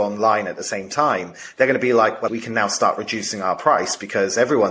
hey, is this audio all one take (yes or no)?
no